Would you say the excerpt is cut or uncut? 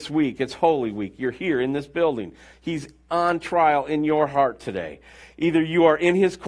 uncut